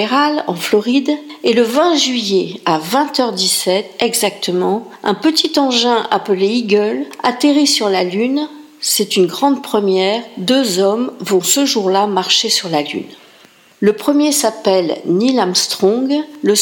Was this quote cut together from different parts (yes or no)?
no